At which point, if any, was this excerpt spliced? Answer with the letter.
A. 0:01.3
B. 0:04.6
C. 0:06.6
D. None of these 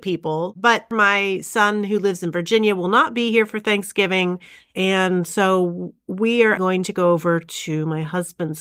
C